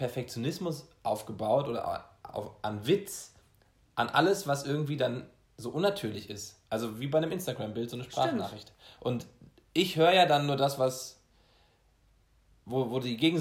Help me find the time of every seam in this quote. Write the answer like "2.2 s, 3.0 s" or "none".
none

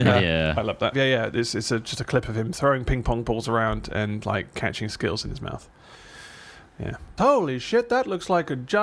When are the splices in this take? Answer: 0.9 s, 7.2 s

